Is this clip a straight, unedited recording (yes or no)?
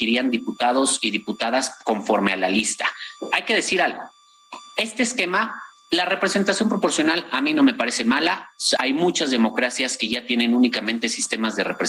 no